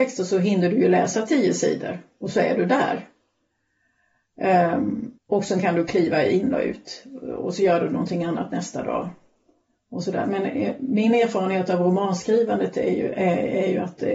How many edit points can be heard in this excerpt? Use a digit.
1